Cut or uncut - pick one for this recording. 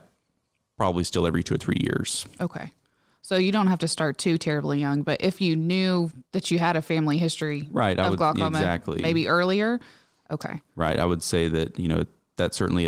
uncut